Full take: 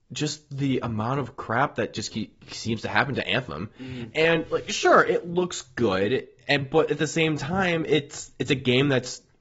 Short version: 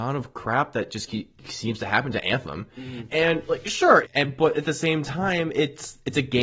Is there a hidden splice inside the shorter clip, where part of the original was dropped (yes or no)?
yes